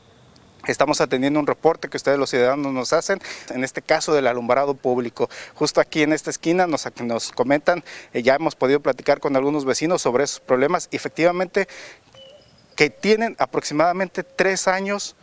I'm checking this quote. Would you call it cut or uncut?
cut